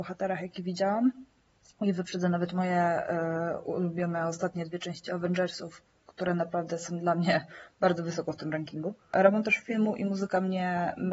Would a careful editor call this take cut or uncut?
uncut